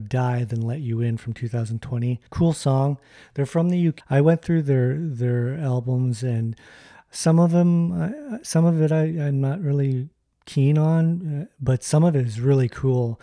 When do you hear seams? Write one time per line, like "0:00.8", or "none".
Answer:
0:02.3
0:04.0